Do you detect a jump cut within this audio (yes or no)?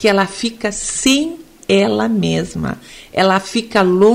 no